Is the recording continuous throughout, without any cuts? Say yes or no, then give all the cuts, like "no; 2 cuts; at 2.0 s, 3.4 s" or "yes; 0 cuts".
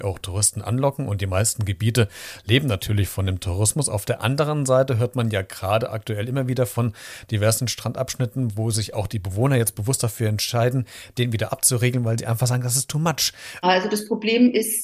no; 1 cut; at 13.6 s